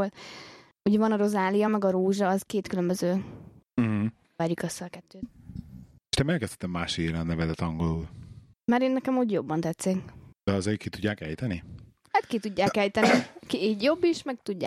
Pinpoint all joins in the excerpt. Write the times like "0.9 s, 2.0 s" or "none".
none